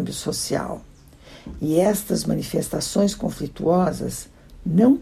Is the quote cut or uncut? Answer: uncut